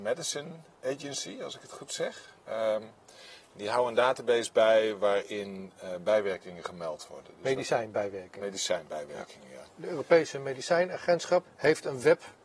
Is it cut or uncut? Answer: cut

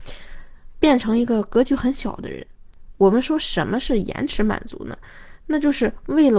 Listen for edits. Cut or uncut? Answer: uncut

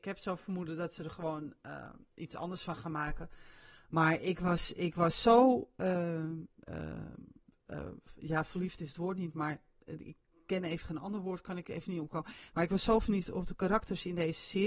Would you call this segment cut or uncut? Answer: uncut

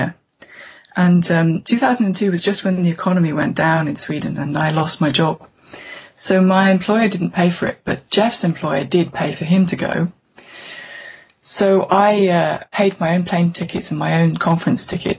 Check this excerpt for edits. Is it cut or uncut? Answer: uncut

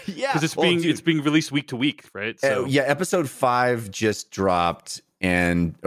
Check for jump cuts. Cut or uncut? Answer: uncut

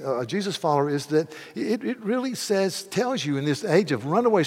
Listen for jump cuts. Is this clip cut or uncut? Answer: uncut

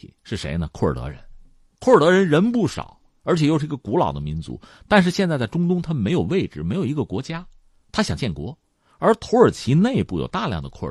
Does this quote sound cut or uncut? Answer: uncut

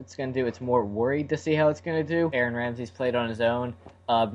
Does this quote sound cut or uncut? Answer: uncut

